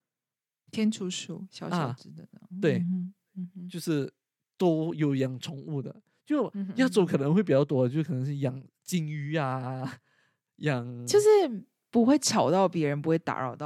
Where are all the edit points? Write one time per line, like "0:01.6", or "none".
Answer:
none